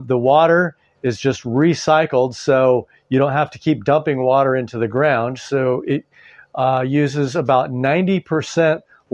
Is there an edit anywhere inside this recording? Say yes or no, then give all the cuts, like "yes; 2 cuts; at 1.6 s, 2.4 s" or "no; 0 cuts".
no; 0 cuts